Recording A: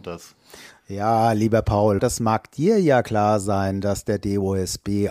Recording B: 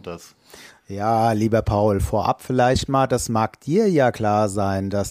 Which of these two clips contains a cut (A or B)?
A